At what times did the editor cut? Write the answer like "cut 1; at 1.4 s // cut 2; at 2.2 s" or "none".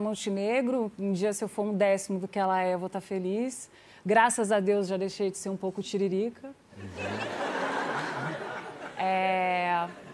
none